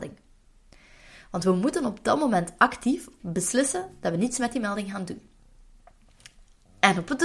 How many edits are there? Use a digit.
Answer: 1